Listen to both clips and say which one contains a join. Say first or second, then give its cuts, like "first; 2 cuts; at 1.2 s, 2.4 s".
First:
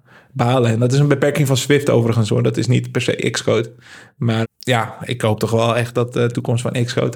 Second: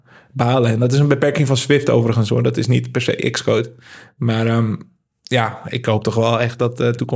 first; 1 cut; at 4.4 s